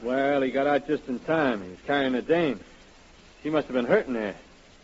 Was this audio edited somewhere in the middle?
no; 0 cuts

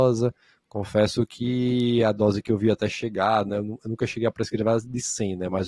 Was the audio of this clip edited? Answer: no; 0 cuts

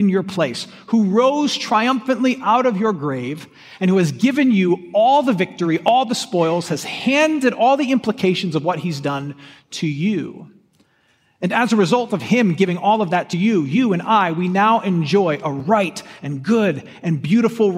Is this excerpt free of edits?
yes; 0 cuts

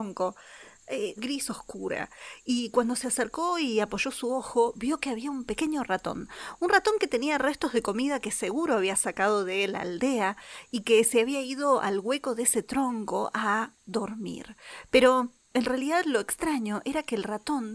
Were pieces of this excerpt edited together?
yes; 1 cut; at 1.2 s

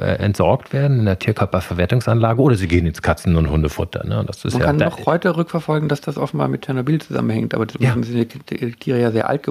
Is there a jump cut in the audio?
yes; 1 cut; at 7.7 s

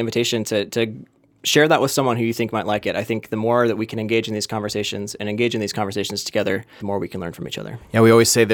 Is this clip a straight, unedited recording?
no; 1 cut; at 6.8 s

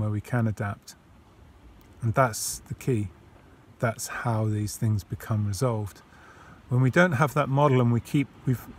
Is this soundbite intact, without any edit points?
yes; 0 cuts

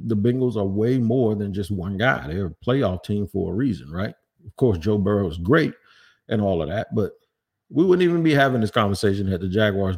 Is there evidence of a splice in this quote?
no; 0 cuts

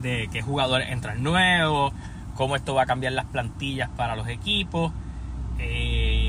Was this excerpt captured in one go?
yes; 0 cuts

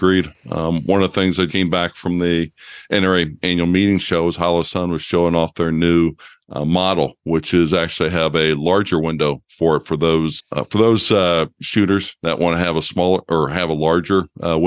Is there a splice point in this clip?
yes; 2 cuts; at 1.5 s, 10.4 s

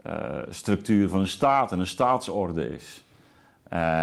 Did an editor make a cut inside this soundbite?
no; 0 cuts

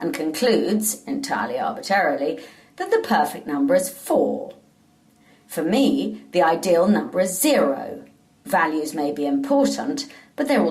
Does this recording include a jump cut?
no; 0 cuts

